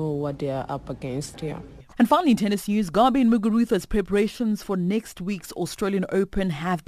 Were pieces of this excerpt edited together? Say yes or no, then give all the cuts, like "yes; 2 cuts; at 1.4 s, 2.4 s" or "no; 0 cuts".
yes; 1 cut; at 1.3 s